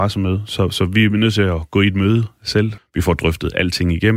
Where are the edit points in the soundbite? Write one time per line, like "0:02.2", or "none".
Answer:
0:02.8